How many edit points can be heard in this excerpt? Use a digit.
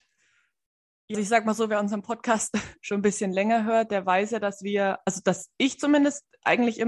1